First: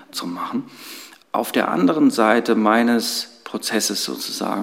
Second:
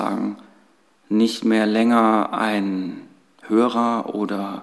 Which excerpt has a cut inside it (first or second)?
first